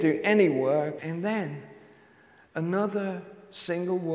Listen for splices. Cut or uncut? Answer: cut